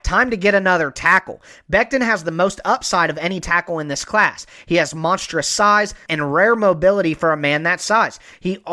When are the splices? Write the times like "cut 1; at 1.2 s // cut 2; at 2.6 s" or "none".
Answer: cut 1; at 6.1 s

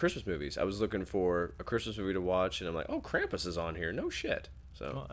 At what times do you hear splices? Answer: none

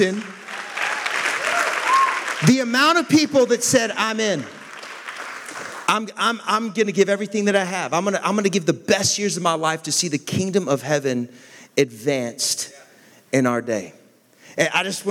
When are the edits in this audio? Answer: none

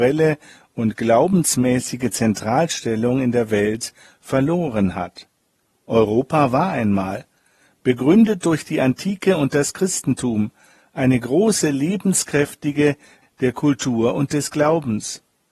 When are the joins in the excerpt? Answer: cut 1; at 13.2 s

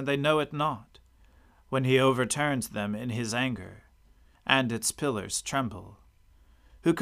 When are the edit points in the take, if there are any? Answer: cut 1; at 4.3 s

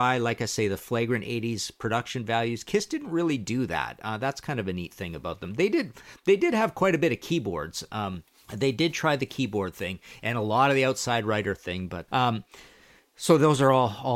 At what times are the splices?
cut 1; at 12.1 s

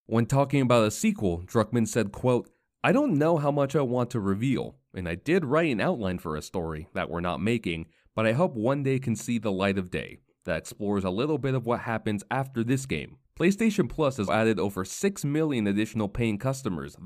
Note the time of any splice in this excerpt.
cut 1; at 13.2 s // cut 2; at 14.3 s

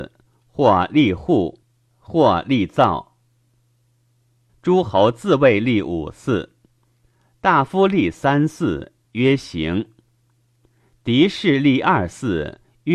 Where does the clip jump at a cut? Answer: cut 1; at 4.5 s // cut 2; at 9.0 s

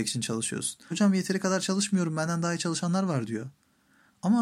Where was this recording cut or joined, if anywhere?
cut 1; at 0.9 s

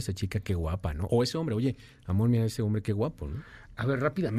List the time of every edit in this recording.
none

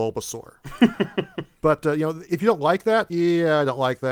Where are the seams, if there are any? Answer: cut 1; at 1.6 s // cut 2; at 3.1 s

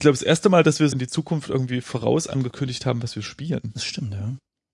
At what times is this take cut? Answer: cut 1; at 0.9 s

